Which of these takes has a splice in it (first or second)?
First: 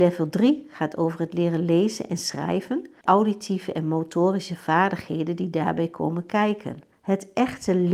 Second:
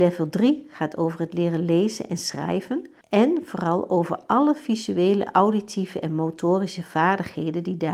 first